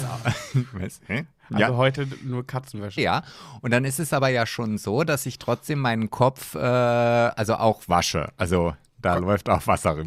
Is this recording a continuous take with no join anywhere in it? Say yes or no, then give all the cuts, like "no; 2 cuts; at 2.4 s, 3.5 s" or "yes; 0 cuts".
no; 1 cut; at 3.0 s